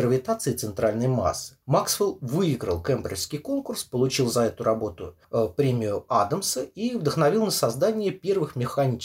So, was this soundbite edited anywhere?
yes; 2 cuts; at 1.6 s, 5.2 s

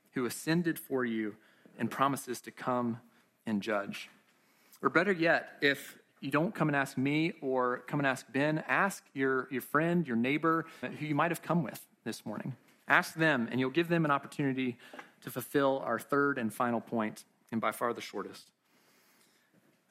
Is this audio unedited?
no; 1 cut; at 10.8 s

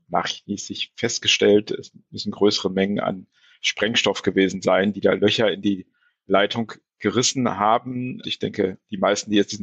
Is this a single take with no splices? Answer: no; 1 cut; at 8.2 s

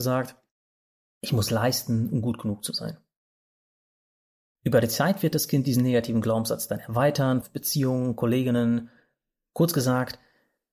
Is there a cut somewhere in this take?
yes; 1 cut; at 7.4 s

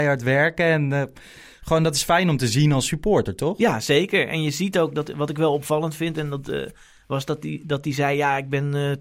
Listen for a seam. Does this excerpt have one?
no; 0 cuts

